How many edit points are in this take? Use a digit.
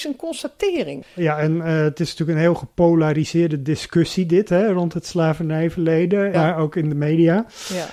2